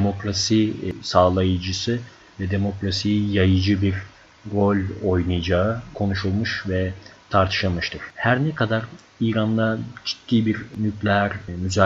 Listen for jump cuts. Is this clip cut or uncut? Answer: cut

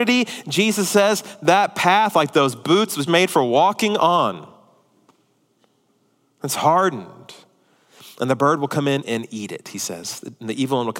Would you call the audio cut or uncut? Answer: cut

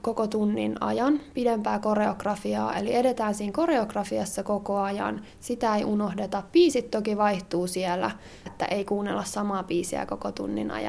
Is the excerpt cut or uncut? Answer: cut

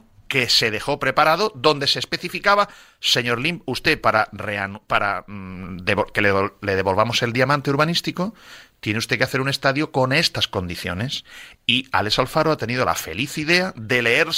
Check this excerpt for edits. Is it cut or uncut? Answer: uncut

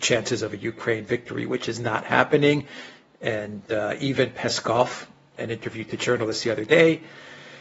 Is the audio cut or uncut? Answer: cut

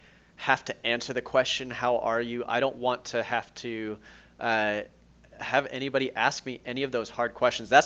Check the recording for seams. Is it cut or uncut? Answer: uncut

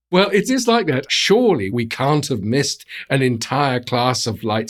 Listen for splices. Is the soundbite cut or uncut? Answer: cut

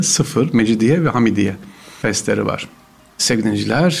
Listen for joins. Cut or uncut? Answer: uncut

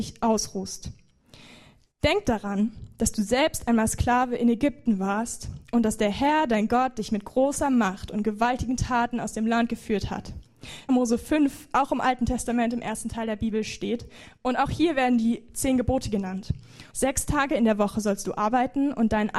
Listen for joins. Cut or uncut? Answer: cut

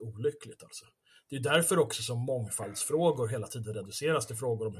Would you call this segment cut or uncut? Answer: uncut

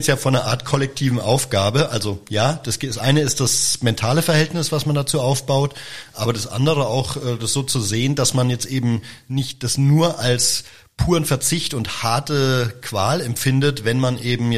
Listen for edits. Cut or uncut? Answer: uncut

